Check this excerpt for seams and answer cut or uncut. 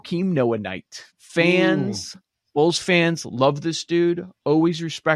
cut